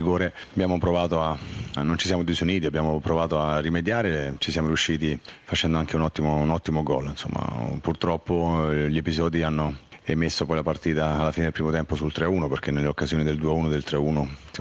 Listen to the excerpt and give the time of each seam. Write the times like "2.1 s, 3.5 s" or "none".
1.8 s